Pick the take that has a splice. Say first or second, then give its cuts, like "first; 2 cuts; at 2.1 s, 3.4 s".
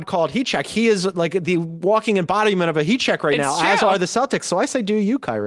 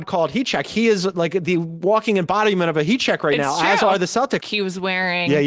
second; 1 cut; at 4.4 s